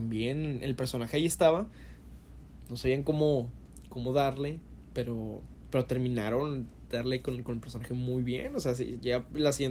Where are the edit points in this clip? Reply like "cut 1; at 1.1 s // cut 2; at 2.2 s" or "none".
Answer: none